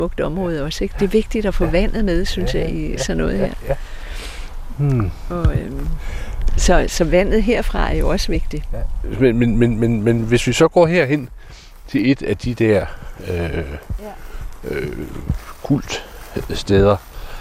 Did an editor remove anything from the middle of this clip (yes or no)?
no